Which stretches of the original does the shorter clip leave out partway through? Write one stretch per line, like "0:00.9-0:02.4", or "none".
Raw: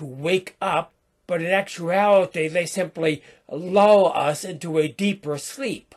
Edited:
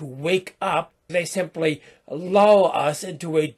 0:01.1-0:02.5